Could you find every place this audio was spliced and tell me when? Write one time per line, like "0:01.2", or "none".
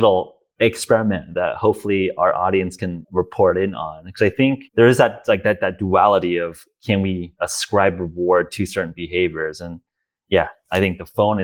0:03.0
0:04.7